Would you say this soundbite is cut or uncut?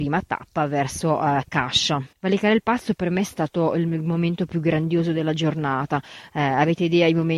cut